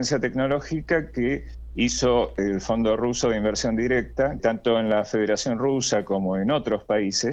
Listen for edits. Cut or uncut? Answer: cut